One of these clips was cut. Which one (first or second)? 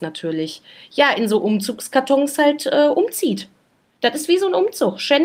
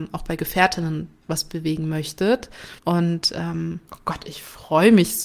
second